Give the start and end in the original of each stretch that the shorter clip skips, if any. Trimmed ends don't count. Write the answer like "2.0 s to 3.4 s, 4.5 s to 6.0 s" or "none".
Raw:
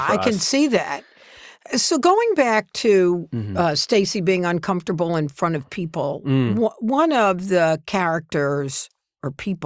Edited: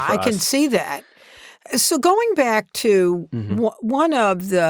3.5 s to 6.5 s

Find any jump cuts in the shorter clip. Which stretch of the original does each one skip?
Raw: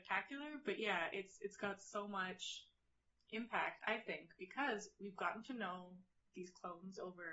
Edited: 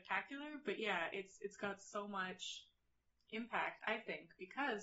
none

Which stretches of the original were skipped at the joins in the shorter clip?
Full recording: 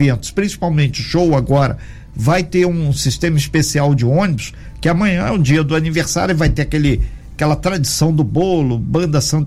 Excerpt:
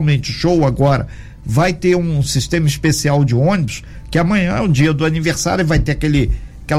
none

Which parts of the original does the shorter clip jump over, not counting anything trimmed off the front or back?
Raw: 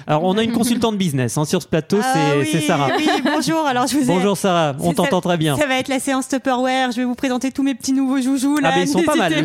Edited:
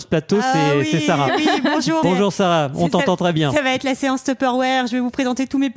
3.6 s to 4.1 s

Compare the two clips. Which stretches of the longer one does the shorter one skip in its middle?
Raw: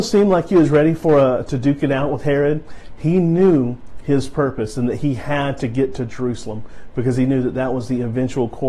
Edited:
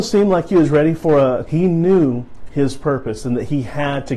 1.5 s to 3.0 s

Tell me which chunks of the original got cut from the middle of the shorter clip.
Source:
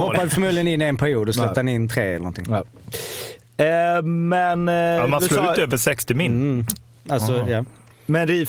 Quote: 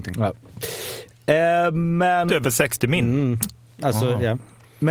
4.6 s to 5.5 s

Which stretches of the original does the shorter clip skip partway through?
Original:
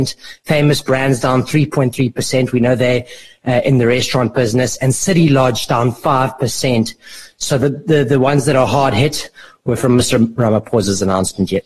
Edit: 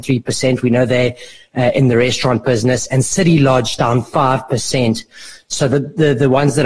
none

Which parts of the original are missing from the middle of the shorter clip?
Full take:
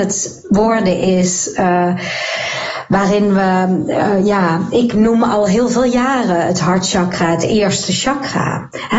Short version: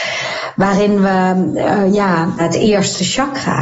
4.7 s to 7.3 s

